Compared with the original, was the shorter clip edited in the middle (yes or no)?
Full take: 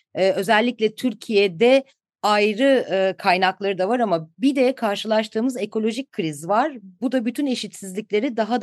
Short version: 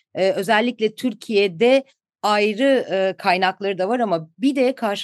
no